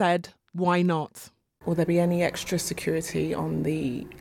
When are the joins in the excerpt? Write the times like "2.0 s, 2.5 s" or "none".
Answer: none